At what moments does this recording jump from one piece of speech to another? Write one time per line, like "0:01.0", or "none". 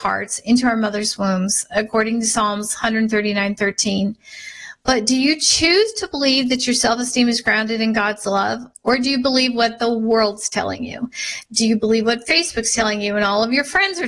none